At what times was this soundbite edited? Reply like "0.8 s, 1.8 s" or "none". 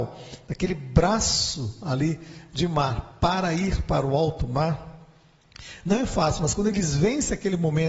none